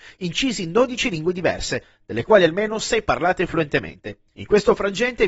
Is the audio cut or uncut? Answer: cut